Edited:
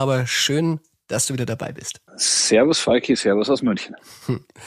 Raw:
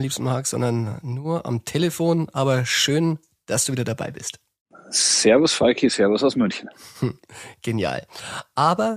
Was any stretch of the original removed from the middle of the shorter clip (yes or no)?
yes